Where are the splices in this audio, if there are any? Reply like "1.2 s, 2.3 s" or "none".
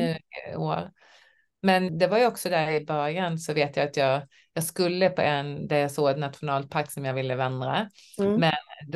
1.9 s

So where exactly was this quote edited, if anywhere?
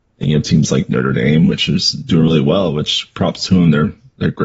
none

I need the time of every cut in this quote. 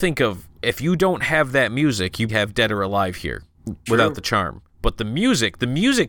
2.3 s, 3.9 s

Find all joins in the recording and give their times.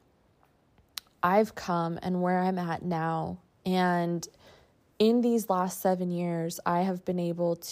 none

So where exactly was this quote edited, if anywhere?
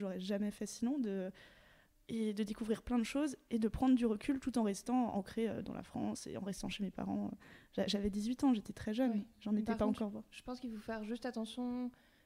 none

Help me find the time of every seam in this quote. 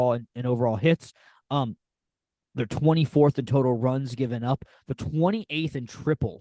none

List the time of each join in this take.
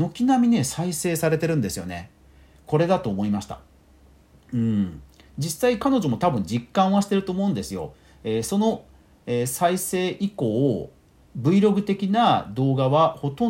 none

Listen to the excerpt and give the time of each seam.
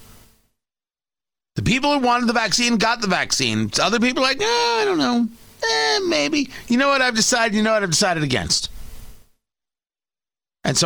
none

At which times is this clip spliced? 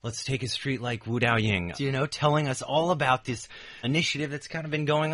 1.7 s, 3.8 s

